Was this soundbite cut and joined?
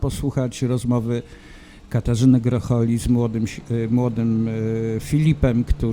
no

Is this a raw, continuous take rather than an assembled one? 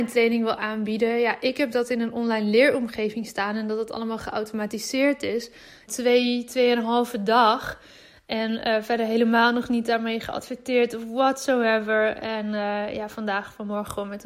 no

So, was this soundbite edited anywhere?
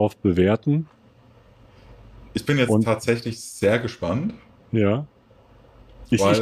no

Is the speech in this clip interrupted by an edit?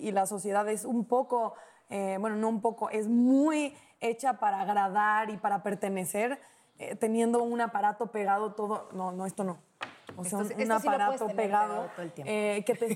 no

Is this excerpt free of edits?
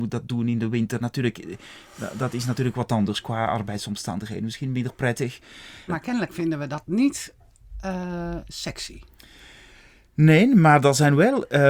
no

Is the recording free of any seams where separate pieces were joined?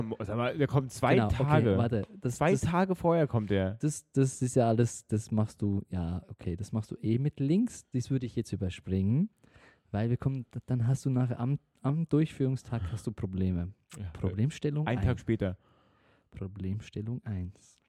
yes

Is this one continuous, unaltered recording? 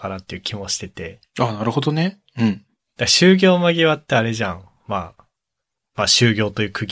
yes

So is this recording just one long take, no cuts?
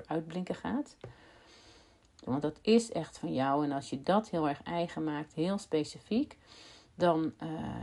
no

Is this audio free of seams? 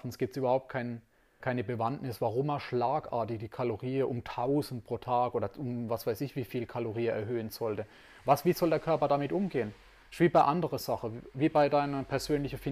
no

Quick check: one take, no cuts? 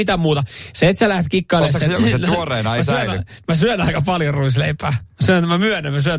no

